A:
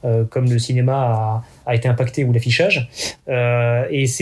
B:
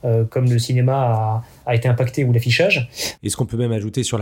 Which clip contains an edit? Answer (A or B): B